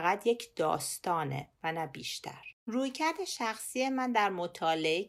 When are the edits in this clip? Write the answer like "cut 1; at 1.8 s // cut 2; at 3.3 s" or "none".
cut 1; at 2.6 s

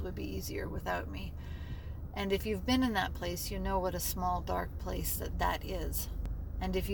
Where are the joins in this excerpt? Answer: cut 1; at 5.3 s

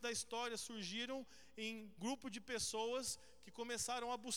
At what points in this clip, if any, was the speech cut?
cut 1; at 2.0 s

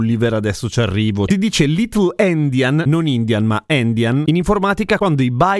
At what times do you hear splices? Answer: cut 1; at 1.3 s

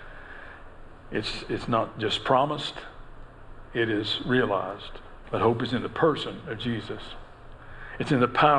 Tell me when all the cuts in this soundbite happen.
cut 1; at 5.2 s

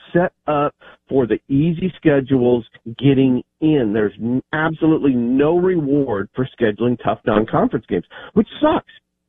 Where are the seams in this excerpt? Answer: none

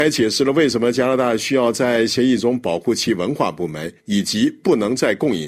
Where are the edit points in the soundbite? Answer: cut 1; at 4.0 s

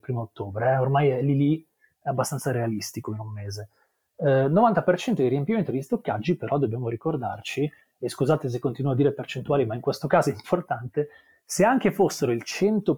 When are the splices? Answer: none

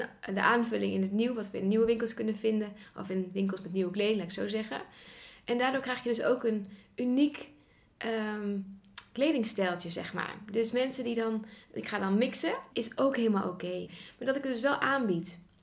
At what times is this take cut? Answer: cut 1; at 12.7 s // cut 2; at 13.9 s

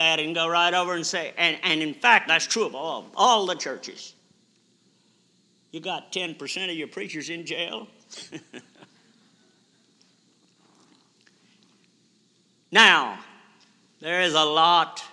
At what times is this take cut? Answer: cut 1; at 2.3 s

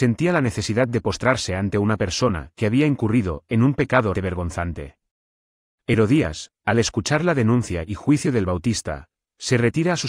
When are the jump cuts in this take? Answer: cut 1; at 4.1 s

